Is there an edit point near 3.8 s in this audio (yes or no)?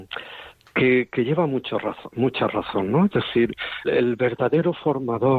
yes